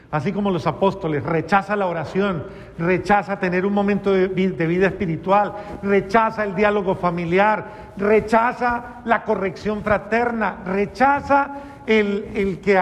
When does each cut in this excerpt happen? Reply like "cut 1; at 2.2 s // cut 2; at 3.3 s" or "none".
none